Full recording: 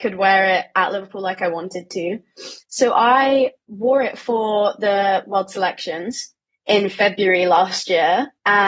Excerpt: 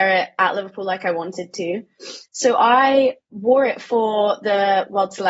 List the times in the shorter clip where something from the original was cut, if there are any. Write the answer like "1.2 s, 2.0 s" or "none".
none